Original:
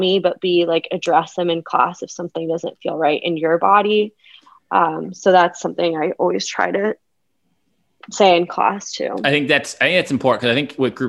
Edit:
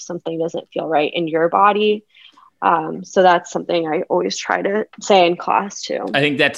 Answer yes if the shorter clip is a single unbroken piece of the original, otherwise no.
no